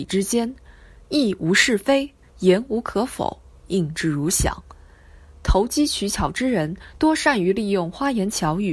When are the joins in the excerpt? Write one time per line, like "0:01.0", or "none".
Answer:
0:02.2